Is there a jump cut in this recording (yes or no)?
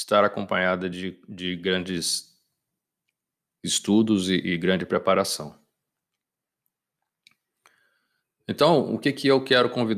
no